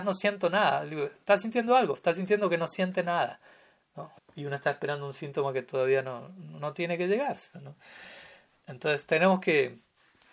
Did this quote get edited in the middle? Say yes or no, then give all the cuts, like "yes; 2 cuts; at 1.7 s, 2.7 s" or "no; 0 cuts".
yes; 2 cuts; at 4.2 s, 7.5 s